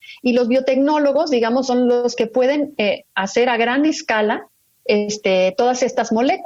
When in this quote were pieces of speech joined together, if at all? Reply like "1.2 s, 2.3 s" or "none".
none